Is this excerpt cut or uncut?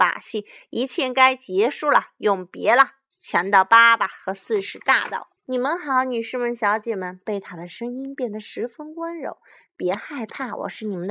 cut